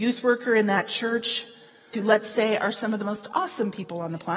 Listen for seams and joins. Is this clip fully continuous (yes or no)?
no